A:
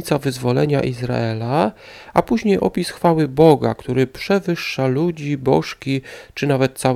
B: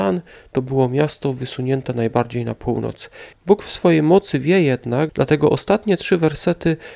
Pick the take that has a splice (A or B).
B